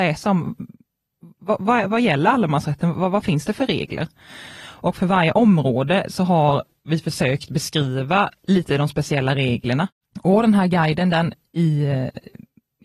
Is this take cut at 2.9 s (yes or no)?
no